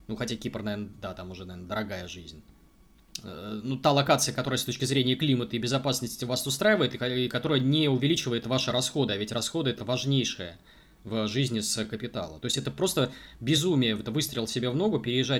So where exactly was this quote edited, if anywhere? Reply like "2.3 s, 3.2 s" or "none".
none